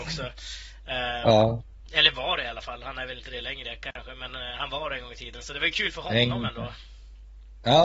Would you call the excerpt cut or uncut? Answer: uncut